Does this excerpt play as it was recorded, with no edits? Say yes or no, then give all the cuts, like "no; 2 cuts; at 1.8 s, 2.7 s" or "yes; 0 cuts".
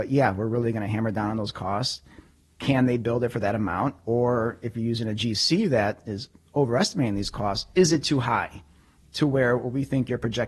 yes; 0 cuts